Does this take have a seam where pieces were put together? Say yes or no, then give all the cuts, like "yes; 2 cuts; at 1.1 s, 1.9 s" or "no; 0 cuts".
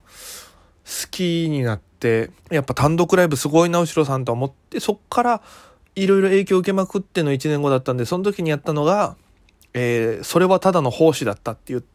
yes; 1 cut; at 2.4 s